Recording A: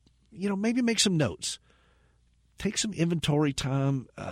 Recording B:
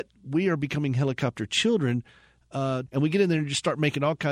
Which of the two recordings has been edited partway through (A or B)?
B